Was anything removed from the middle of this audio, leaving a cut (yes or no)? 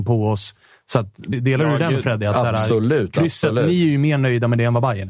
yes